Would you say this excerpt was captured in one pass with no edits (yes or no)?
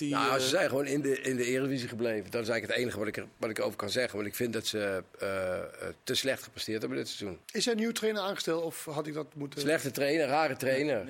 no